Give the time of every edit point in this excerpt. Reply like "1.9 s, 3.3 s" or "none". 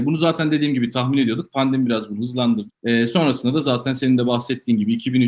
2.7 s